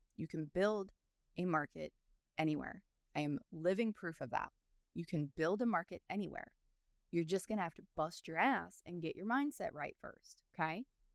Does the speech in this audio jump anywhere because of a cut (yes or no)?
no